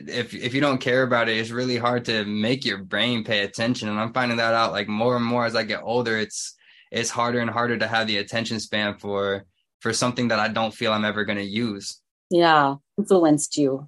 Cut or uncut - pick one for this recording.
cut